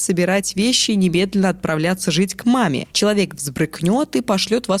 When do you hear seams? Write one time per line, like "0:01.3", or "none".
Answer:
0:02.9